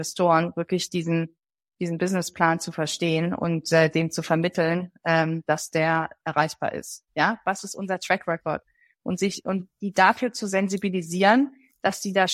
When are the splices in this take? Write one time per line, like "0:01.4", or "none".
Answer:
0:07.1